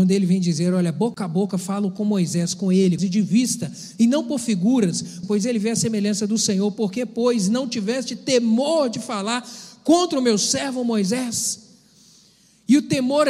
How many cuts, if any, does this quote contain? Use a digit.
2